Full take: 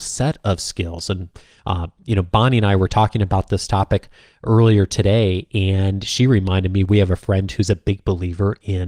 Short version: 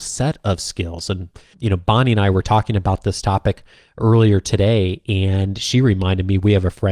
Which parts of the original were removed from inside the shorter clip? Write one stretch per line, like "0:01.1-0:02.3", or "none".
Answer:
0:01.5-0:02.0